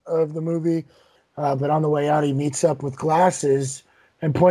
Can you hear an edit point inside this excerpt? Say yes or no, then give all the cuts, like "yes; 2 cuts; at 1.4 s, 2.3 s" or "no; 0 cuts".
yes; 1 cut; at 1.1 s